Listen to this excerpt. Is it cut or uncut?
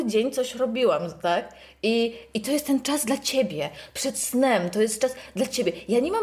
uncut